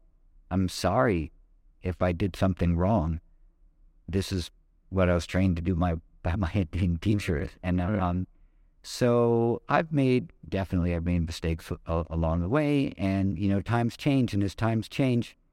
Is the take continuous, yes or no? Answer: yes